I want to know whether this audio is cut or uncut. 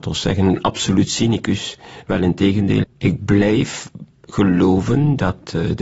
cut